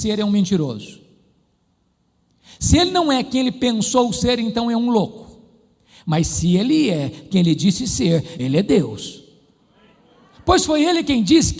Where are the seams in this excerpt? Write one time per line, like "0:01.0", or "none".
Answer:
0:08.4

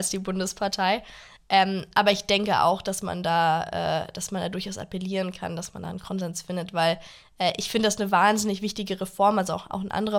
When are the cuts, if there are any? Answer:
none

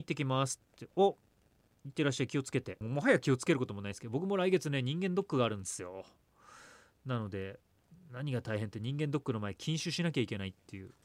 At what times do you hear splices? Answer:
0:02.8

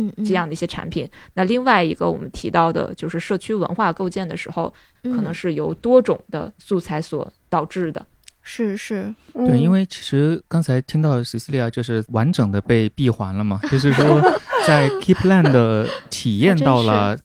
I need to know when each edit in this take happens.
0:04.9

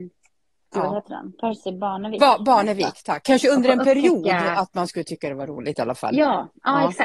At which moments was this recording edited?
0:03.2

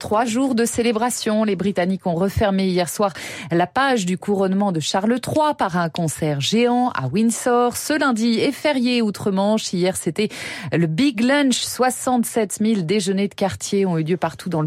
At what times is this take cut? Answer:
none

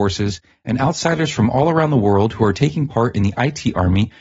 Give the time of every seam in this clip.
none

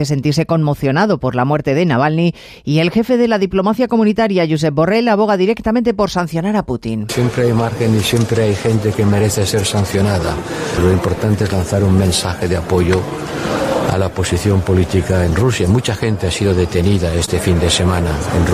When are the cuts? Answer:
none

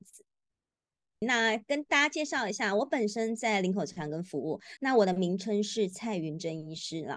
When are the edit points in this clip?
0:01.2
0:04.8

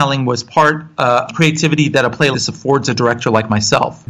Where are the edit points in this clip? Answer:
0:01.3
0:02.3

